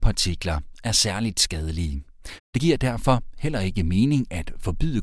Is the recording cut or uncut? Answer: cut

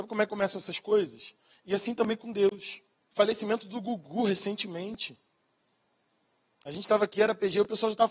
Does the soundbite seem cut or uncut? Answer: cut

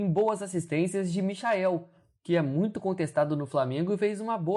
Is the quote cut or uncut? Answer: uncut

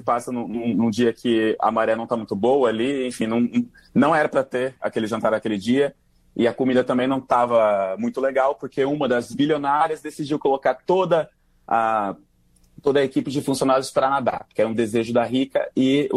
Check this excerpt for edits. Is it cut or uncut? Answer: uncut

